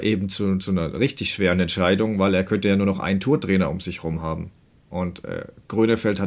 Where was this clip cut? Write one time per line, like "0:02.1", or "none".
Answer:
none